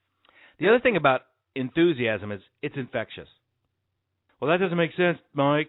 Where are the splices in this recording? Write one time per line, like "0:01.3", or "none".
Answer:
0:04.3